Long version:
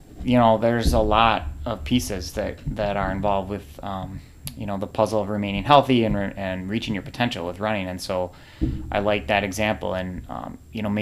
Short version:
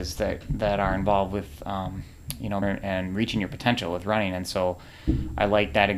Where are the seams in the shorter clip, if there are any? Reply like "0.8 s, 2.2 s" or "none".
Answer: 2.6 s